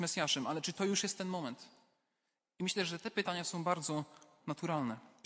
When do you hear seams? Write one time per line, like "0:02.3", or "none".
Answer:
none